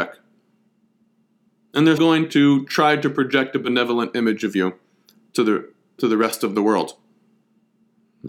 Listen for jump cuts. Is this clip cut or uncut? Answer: cut